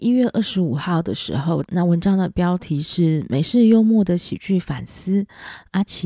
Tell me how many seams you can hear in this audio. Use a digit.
1